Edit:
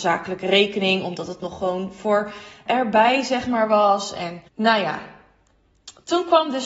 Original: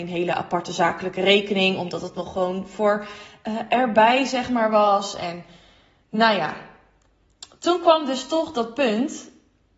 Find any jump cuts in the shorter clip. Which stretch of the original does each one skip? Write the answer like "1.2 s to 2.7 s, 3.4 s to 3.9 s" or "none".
3.4 s to 3.7 s, 5.5 s to 6.0 s